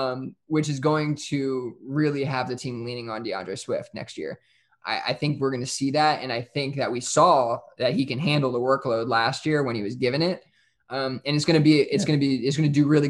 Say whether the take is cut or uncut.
uncut